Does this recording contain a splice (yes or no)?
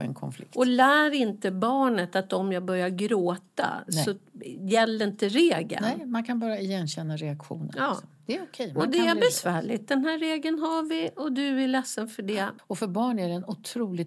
yes